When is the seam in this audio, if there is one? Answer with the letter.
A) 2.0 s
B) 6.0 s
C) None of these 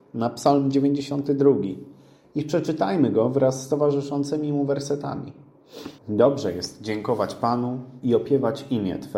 B